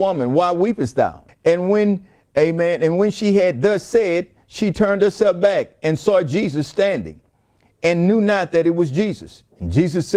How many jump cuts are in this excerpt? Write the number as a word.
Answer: one